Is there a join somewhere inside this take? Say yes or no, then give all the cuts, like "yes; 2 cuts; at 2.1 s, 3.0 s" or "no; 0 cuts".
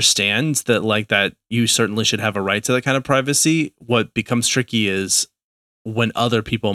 no; 0 cuts